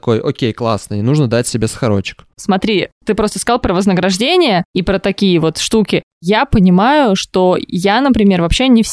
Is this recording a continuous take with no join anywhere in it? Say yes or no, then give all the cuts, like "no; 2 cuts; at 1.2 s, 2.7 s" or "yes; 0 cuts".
no; 1 cut; at 2.3 s